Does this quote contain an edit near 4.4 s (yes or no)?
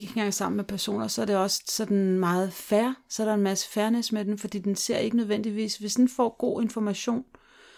no